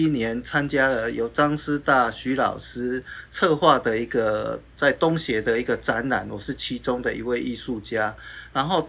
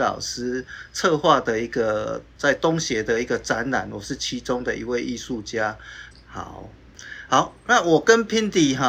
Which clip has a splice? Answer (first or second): second